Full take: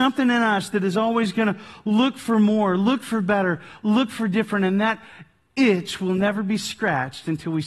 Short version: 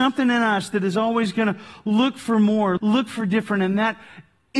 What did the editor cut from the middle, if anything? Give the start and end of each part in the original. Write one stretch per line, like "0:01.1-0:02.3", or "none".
0:02.8-0:03.8